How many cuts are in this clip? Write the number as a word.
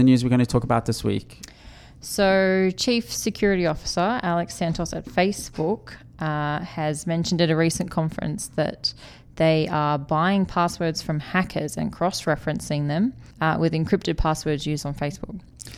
one